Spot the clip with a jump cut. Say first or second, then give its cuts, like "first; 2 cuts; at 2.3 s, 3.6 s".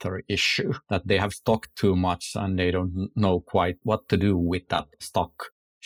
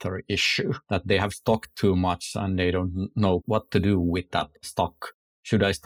second; 1 cut; at 3.4 s